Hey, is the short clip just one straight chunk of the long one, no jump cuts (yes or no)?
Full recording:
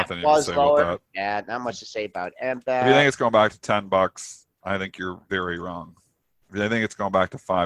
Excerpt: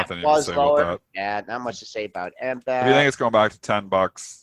yes